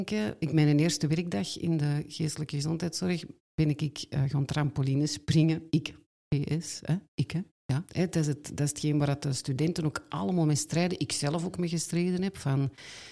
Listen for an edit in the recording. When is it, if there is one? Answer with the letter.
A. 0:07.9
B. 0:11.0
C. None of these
A